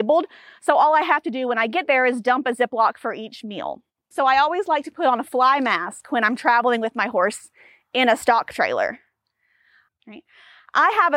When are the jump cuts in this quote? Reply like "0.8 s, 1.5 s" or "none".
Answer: 4.1 s, 9.9 s